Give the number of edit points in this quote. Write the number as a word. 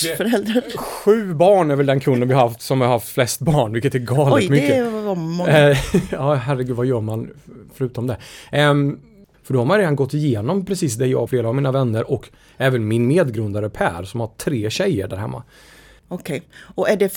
three